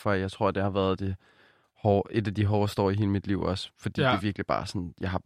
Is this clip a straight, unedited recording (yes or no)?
yes